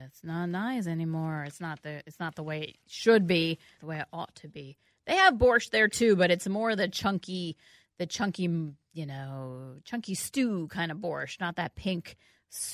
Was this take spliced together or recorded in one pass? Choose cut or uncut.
cut